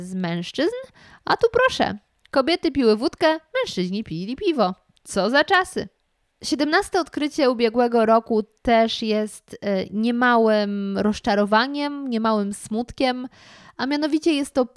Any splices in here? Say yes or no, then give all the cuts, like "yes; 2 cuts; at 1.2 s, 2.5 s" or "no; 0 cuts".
no; 0 cuts